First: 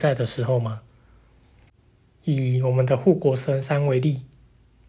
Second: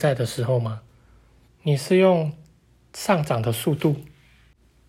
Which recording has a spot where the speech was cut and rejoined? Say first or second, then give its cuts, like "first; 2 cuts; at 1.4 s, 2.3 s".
second; 1 cut; at 1.5 s